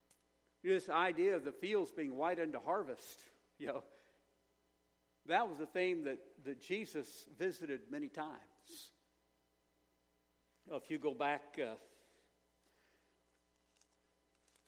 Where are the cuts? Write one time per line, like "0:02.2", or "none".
none